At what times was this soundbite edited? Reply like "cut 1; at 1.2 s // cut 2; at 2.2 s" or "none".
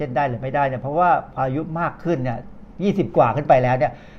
cut 1; at 1.4 s